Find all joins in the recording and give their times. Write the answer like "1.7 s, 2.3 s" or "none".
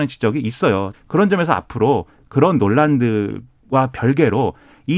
0.9 s